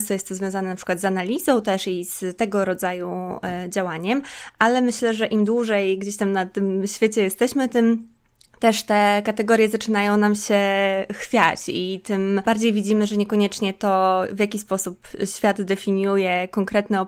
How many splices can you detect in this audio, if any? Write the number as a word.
zero